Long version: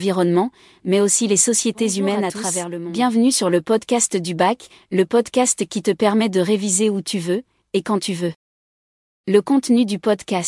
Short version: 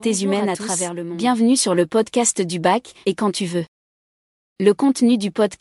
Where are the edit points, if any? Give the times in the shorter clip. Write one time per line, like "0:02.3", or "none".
0:03.0